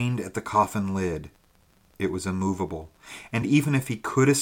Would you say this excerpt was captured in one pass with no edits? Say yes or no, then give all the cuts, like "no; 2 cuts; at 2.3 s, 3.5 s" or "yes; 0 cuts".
yes; 0 cuts